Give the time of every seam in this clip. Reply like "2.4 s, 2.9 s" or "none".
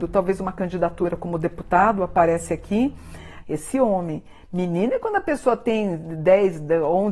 3.4 s